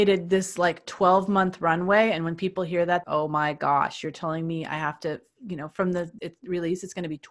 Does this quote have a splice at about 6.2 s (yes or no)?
yes